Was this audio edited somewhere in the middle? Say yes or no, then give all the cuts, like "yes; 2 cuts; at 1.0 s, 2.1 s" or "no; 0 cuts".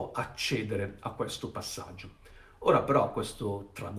no; 0 cuts